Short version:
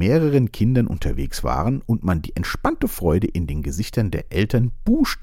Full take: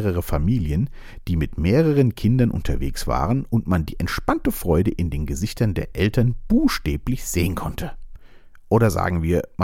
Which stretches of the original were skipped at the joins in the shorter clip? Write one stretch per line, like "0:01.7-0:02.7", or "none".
none